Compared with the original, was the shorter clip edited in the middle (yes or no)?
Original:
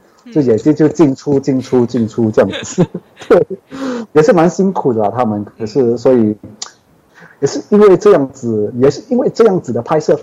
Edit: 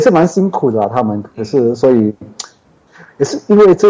no